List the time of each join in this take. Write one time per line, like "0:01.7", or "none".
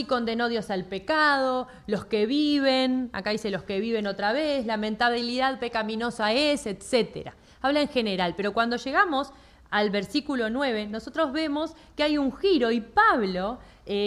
none